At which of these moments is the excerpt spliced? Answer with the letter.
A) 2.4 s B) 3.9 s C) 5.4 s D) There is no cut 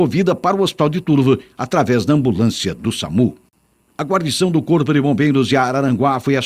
B